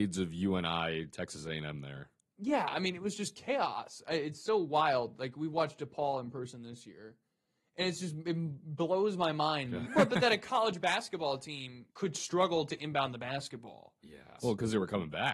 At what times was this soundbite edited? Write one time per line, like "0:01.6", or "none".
0:09.9
0:11.9
0:14.4